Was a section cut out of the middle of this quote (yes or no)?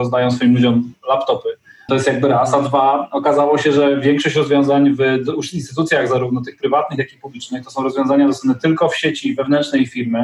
yes